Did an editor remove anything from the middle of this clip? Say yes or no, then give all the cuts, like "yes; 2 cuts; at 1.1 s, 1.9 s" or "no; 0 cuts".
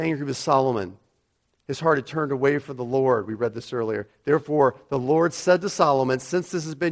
no; 0 cuts